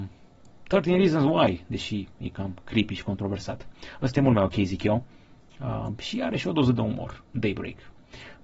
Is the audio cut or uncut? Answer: uncut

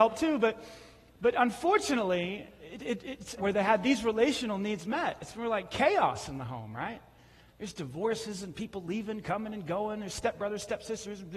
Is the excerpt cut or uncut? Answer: cut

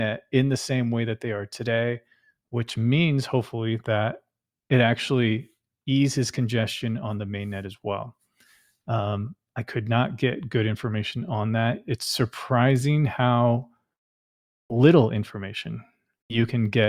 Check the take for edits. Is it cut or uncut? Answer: uncut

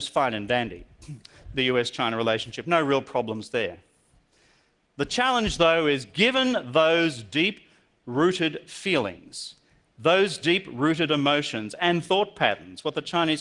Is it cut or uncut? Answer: uncut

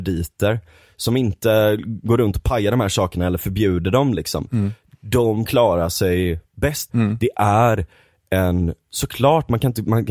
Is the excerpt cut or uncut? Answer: cut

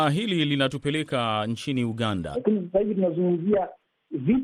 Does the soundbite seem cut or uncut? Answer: cut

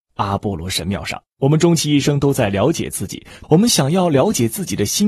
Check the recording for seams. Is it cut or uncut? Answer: cut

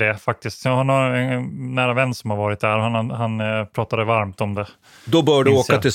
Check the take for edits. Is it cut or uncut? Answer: uncut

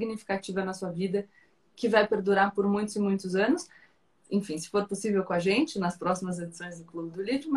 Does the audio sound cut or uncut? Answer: uncut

